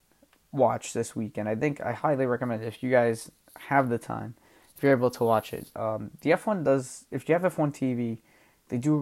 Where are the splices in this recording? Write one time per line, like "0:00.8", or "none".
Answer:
none